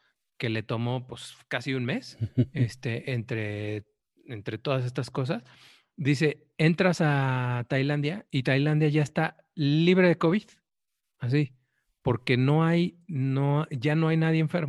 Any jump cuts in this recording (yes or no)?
no